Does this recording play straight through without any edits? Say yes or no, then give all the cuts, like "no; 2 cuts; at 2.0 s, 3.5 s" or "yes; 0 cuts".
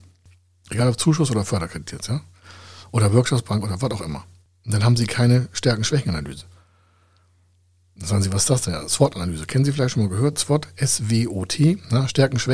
yes; 0 cuts